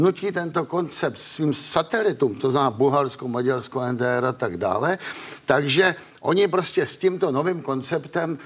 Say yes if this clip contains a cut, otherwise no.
no